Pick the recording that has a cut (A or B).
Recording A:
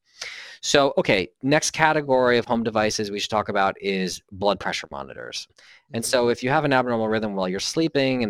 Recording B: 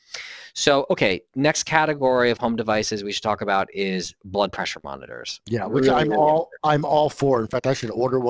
A